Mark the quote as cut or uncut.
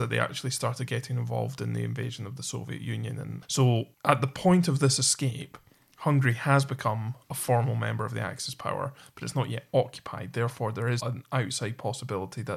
cut